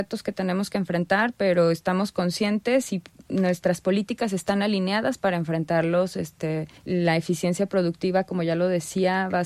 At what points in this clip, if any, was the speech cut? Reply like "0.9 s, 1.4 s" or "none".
6.8 s